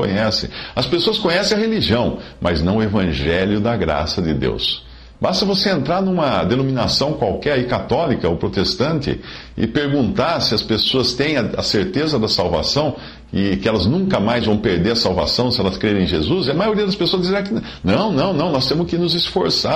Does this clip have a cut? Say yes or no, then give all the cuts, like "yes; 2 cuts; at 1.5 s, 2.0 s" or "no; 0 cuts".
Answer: no; 0 cuts